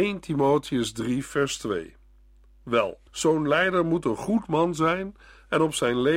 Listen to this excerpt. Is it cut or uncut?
cut